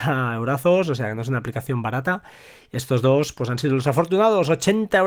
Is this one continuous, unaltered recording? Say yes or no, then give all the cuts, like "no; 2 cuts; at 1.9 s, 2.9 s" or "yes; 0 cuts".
yes; 0 cuts